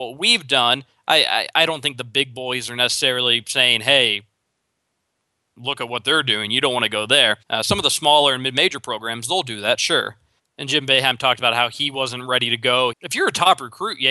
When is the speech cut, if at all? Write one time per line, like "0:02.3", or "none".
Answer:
0:07.4
0:10.4
0:12.9